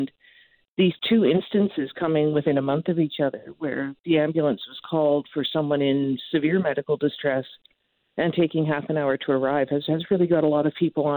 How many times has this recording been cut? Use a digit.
0